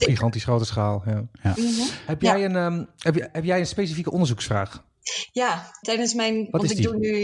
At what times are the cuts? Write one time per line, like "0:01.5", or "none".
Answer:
0:05.8